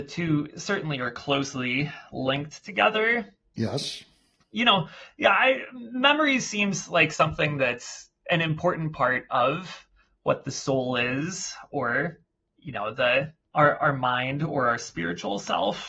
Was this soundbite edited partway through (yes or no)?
yes